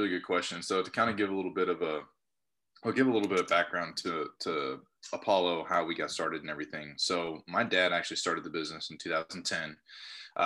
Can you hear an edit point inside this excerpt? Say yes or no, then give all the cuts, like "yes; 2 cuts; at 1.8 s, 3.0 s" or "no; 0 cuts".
no; 0 cuts